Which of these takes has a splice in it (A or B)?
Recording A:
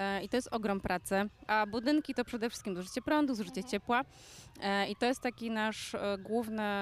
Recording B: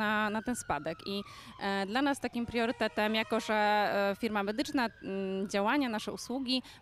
A